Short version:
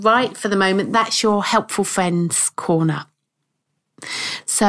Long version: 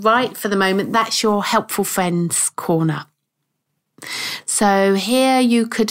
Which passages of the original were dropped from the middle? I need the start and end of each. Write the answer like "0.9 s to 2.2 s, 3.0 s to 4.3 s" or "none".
none